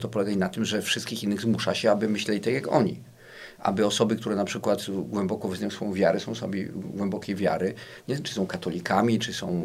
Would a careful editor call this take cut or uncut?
uncut